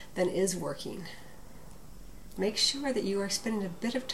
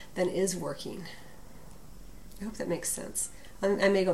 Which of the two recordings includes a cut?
first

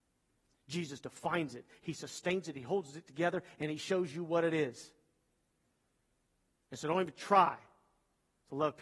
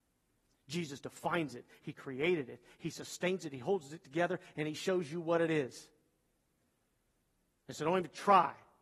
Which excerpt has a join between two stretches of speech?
first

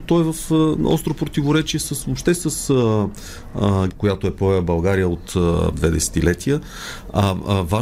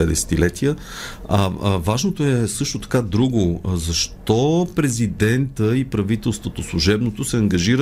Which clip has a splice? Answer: first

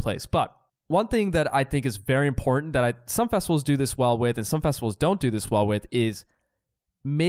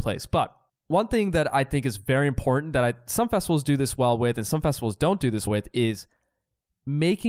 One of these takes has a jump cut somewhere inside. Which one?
second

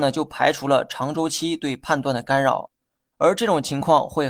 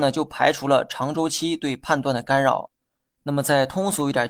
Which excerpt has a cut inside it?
first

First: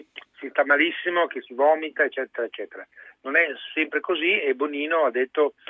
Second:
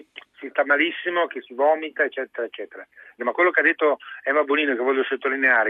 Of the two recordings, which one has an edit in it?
second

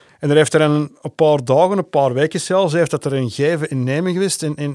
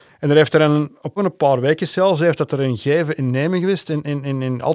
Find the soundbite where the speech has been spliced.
second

